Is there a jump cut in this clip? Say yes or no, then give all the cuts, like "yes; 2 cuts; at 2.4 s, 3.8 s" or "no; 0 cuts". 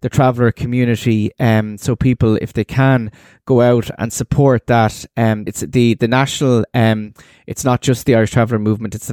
yes; 1 cut; at 5.5 s